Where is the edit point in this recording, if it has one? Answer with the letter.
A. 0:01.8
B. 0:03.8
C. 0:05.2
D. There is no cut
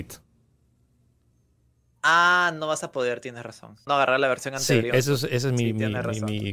B